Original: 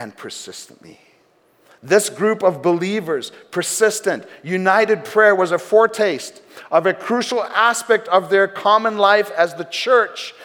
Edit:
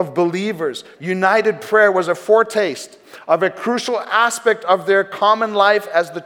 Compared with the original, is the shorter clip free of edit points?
no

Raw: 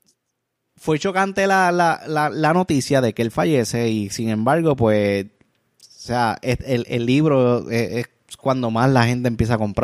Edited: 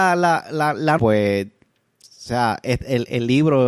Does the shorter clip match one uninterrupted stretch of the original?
no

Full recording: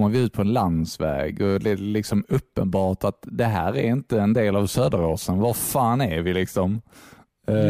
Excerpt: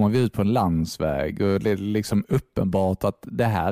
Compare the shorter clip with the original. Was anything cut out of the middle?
no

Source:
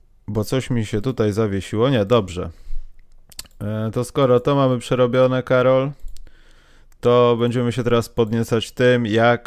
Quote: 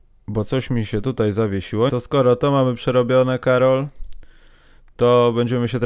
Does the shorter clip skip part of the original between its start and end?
yes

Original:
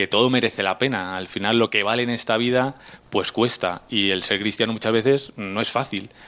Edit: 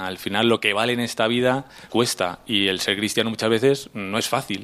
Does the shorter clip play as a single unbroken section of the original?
no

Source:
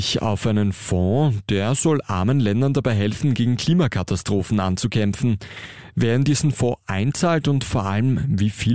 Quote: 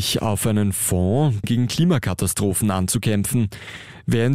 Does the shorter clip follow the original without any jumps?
no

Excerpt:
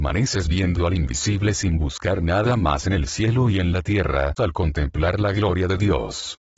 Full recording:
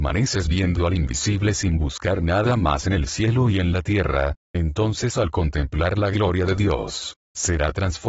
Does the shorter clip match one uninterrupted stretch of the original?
no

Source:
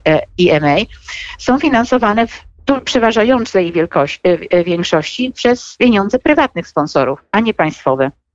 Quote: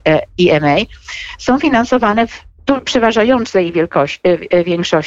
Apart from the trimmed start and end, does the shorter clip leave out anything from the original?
no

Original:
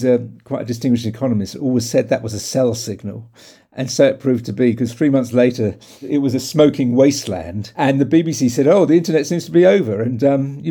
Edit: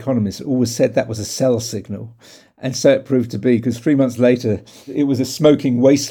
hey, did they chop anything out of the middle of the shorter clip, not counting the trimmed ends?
no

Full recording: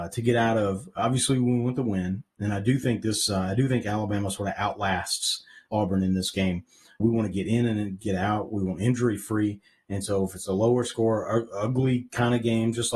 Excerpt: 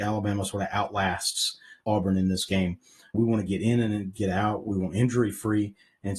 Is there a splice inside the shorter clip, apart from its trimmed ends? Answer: no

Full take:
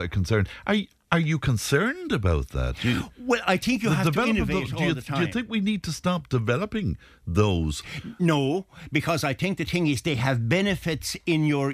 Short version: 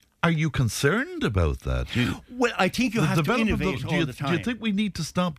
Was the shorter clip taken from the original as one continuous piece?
yes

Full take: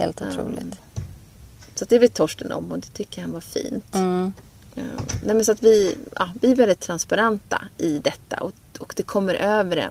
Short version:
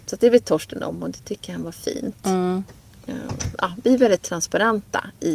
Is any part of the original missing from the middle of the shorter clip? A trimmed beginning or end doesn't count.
yes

